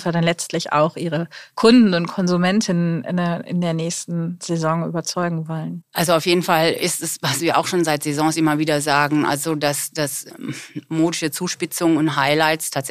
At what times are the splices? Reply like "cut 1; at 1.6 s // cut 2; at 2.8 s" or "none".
none